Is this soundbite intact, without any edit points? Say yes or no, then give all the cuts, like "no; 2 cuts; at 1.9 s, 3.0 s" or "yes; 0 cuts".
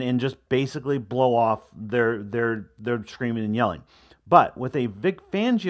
yes; 0 cuts